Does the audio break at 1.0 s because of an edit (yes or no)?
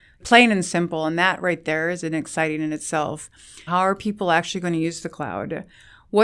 no